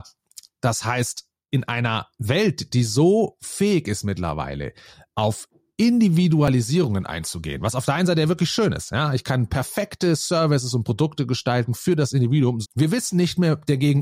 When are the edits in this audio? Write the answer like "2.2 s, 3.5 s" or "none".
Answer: 12.6 s